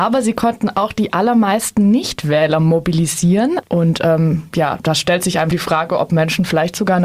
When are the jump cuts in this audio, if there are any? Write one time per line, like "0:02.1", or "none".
0:03.6
0:05.5